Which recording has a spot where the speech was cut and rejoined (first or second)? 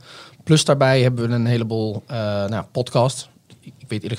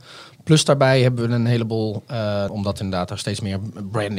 second